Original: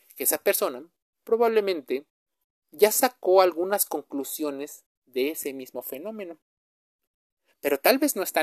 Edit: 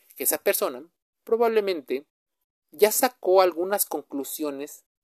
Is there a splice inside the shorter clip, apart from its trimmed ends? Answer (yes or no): no